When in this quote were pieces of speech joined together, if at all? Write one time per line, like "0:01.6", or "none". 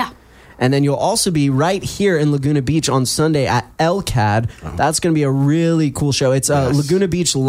none